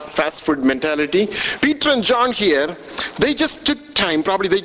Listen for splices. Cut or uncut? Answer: cut